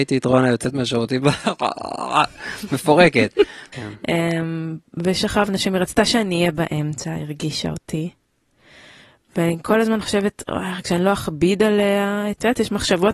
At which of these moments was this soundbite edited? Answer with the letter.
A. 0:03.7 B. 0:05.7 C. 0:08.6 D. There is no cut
A